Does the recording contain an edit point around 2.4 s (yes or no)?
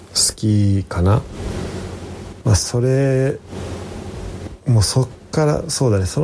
yes